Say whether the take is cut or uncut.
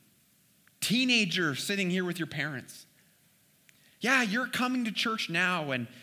uncut